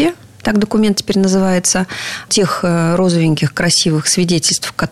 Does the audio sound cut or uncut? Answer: cut